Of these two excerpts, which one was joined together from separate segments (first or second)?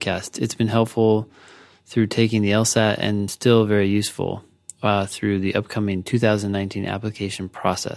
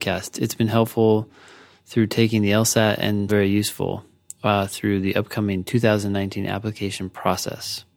second